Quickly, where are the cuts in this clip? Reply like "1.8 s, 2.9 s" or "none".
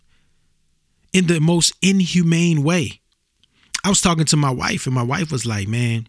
none